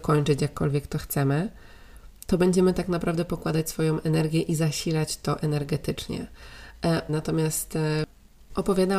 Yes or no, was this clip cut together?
yes